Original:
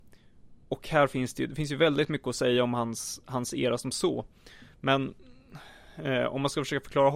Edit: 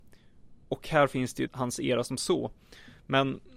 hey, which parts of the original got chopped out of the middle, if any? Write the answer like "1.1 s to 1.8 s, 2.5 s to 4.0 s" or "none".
1.5 s to 3.2 s